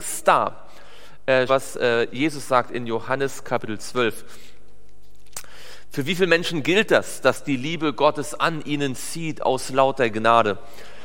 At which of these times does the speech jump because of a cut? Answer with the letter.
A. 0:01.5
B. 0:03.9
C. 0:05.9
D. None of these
A